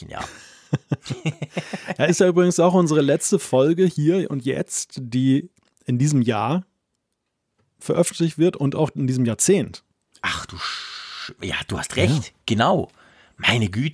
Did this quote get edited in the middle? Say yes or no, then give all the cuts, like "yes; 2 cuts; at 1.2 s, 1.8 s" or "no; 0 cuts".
no; 0 cuts